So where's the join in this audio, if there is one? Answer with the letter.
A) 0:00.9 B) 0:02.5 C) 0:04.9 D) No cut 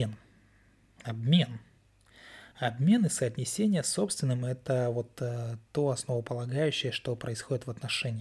D